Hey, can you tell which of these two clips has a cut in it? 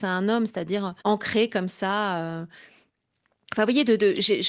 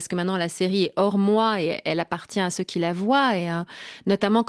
first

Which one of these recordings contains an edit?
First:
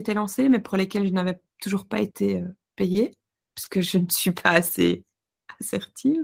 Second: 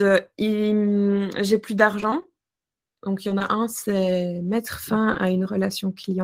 second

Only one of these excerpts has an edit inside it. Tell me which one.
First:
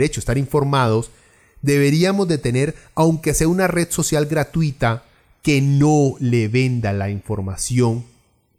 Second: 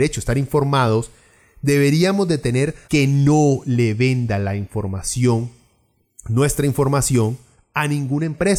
second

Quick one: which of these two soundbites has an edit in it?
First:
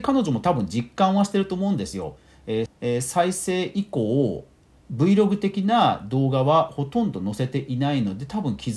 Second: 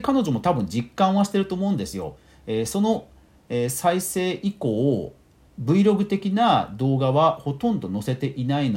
first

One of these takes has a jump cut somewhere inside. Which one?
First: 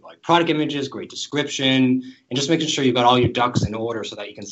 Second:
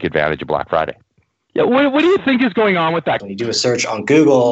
second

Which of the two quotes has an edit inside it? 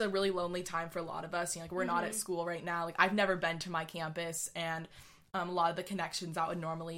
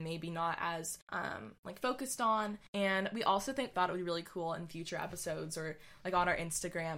second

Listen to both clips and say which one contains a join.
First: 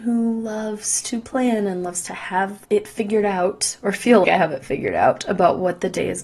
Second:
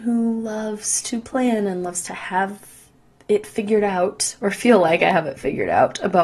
first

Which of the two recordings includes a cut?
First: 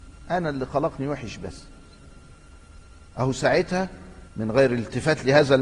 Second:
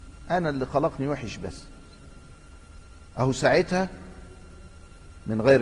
first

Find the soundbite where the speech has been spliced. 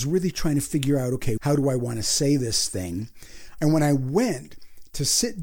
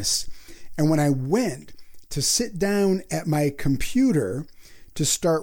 first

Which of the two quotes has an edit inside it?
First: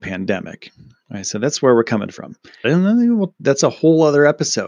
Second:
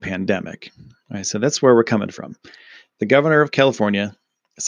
first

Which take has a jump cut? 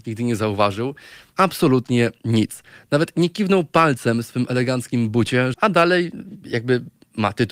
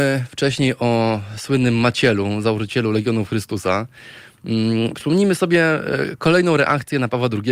first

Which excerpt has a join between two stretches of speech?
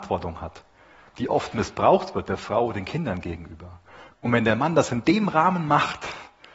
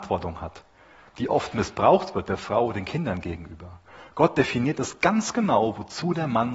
first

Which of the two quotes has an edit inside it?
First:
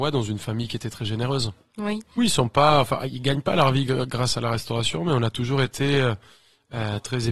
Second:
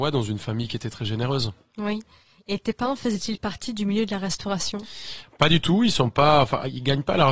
first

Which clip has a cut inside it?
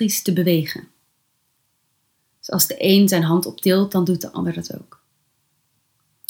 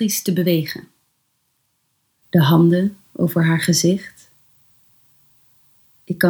second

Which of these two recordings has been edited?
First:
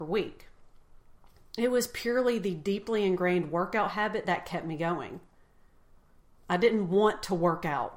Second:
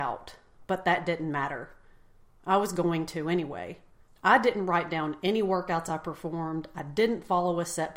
second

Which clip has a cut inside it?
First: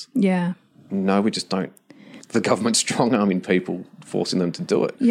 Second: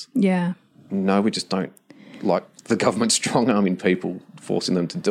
first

